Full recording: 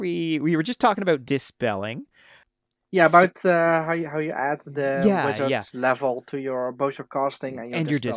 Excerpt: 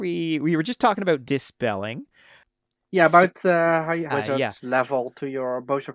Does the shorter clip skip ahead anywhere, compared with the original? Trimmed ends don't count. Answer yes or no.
yes